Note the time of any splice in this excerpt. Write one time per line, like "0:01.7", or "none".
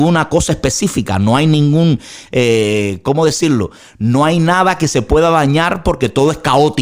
none